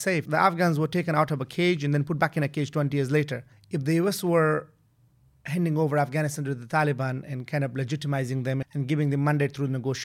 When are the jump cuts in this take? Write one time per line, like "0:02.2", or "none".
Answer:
0:03.5
0:08.6

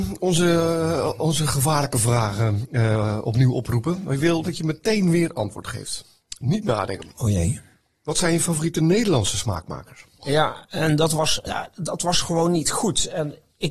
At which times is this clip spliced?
0:10.2
0:11.5

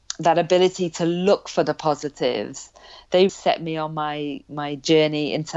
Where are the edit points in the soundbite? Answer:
0:03.3

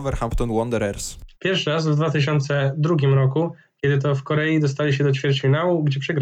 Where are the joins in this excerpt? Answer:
0:01.3

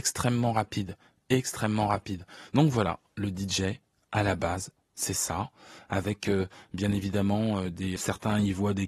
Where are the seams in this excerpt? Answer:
0:02.5
0:08.0

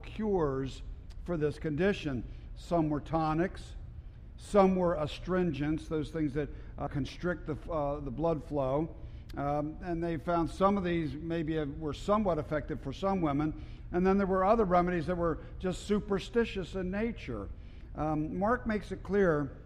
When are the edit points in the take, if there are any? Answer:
0:06.9

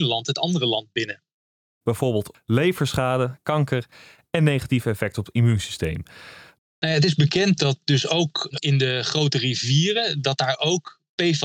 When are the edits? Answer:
0:01.8
0:06.6

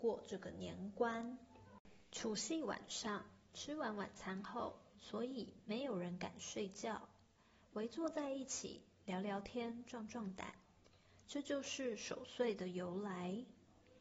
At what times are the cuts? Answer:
0:04.9

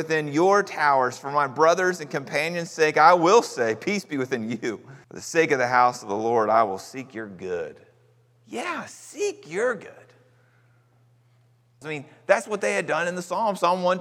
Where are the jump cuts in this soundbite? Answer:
0:05.0
0:11.8

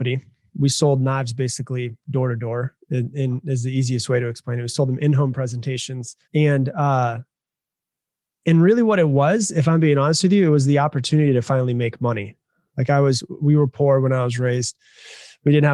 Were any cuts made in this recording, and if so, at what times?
0:06.2

